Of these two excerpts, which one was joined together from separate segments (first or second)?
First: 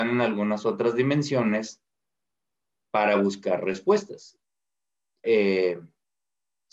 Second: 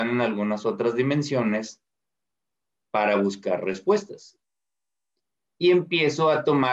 first